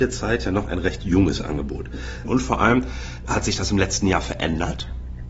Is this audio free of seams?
no; 1 cut; at 2.2 s

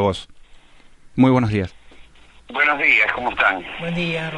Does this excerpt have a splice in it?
no; 0 cuts

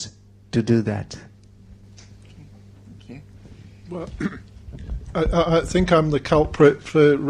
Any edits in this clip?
yes; 1 cut; at 3.8 s

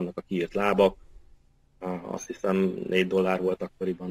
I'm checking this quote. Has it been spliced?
no; 0 cuts

